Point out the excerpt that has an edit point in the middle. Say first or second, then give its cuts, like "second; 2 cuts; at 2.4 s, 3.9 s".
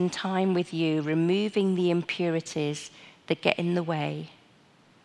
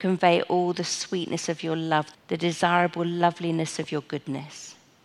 second; 1 cut; at 2.1 s